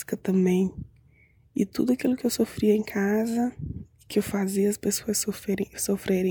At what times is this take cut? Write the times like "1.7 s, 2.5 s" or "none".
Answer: none